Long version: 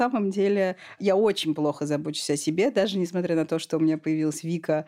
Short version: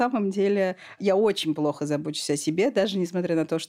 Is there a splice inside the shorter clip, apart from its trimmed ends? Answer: no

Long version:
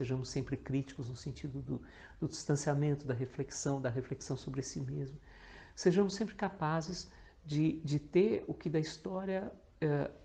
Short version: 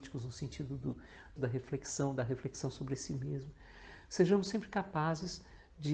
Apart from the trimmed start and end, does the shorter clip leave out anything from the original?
yes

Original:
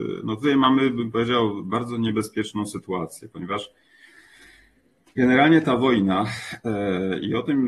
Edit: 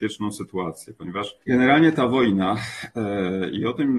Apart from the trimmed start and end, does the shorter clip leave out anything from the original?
yes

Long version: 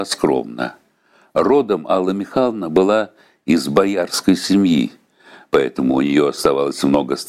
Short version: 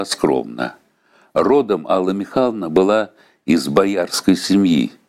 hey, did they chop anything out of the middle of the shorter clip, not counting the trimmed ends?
no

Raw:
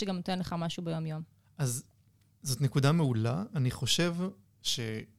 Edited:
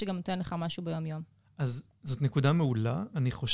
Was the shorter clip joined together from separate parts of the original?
yes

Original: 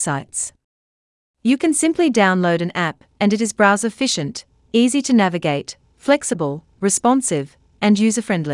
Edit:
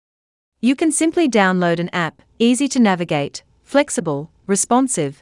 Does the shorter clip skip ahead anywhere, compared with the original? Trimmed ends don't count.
yes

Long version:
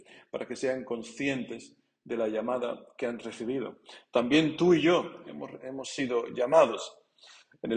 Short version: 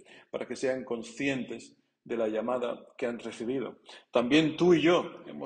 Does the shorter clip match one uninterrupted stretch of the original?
yes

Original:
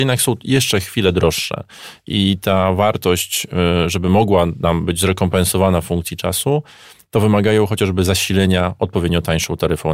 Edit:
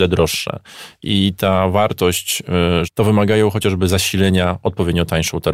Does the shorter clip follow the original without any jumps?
no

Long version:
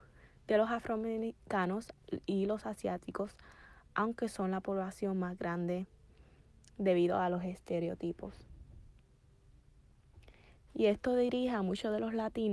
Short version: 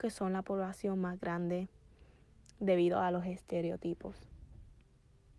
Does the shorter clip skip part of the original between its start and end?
no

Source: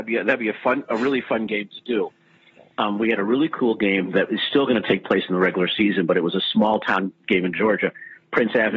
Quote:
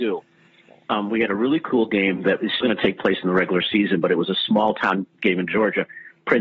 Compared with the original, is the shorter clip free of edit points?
no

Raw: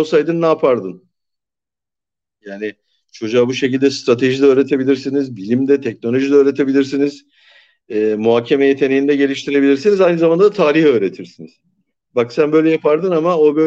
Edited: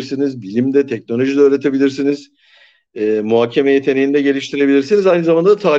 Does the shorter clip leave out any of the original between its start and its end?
no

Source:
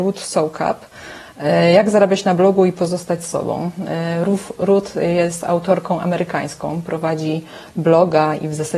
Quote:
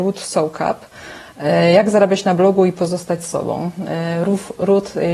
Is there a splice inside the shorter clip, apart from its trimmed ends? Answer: no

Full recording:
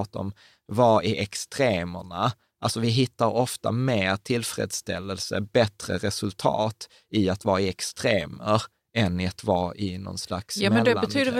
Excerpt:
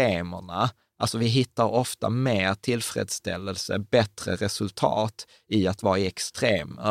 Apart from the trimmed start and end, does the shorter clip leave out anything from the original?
no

